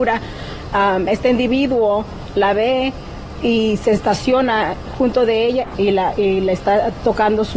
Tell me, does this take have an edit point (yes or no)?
yes